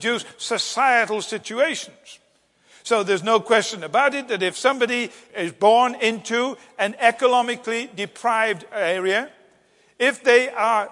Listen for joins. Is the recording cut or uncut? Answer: uncut